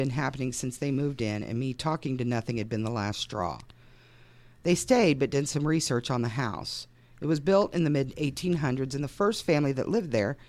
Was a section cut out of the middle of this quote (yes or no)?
no